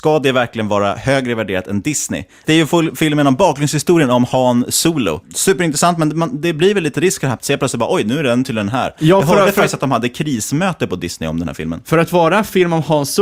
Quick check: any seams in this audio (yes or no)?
yes